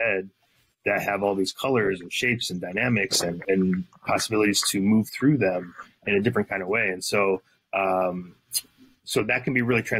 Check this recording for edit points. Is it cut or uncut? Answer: cut